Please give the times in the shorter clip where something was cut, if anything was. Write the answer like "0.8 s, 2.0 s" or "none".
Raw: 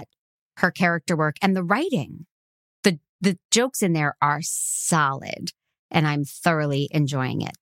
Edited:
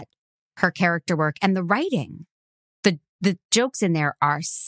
none